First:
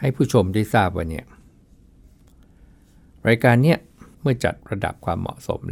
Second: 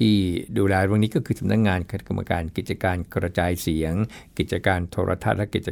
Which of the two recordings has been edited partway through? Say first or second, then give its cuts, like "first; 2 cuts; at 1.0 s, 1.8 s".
first; 1 cut; at 4.1 s